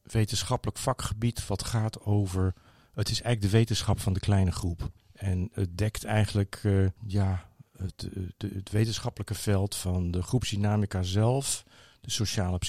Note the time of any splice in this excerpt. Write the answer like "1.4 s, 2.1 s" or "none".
none